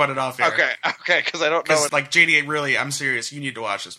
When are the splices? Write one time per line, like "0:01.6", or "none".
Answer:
0:01.9